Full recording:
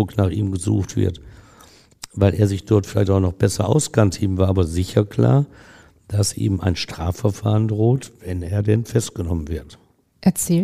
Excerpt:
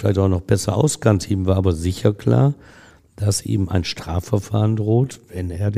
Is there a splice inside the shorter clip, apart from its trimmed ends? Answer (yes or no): no